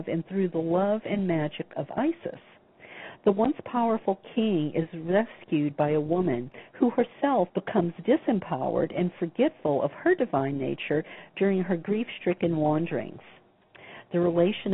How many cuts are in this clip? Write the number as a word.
one